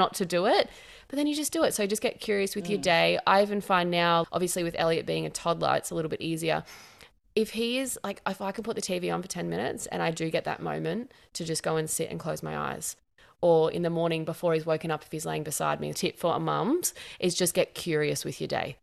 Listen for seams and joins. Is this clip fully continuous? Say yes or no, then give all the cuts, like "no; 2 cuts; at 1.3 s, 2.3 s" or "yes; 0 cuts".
no; 2 cuts; at 4.2 s, 15.9 s